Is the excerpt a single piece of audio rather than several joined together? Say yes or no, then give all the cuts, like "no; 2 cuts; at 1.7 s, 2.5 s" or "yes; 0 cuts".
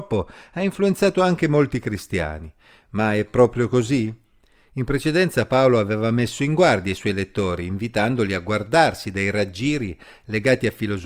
yes; 0 cuts